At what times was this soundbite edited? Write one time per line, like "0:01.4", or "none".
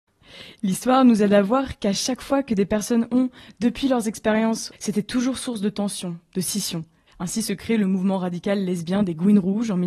0:04.7
0:07.1